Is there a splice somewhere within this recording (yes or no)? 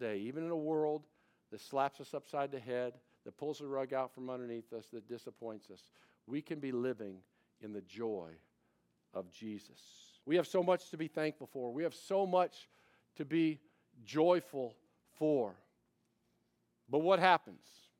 yes